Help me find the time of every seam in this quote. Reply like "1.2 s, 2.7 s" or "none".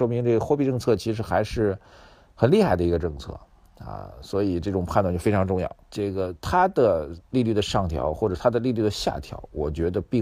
5.8 s